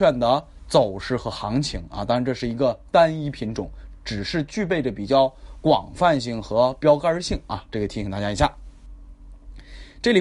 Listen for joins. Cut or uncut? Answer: uncut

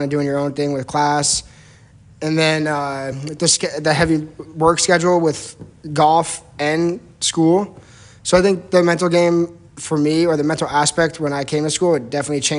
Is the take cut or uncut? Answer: uncut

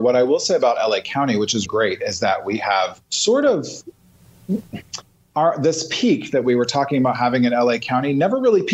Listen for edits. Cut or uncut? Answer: cut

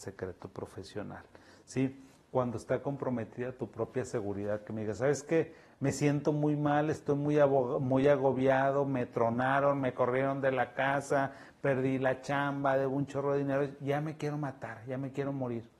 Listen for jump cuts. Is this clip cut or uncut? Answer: uncut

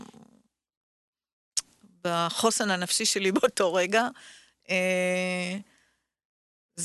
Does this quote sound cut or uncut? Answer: uncut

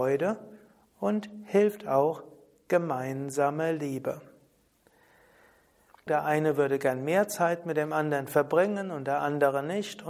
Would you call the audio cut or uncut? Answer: cut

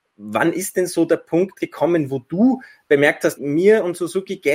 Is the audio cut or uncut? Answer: cut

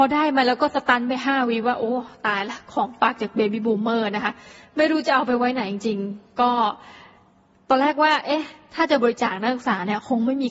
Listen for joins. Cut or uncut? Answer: uncut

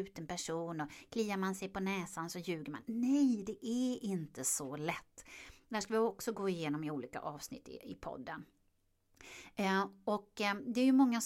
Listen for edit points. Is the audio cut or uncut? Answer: uncut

